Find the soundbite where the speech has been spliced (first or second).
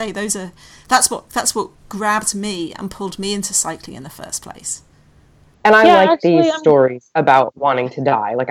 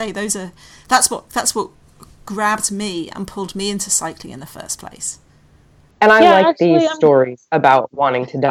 first